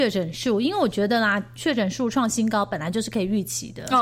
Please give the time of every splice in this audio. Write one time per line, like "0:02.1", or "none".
0:01.6